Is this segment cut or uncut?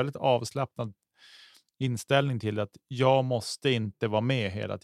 uncut